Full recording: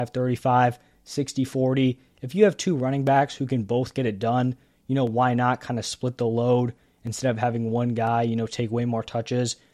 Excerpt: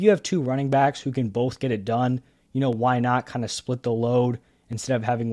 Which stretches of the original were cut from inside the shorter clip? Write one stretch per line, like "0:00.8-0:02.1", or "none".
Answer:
none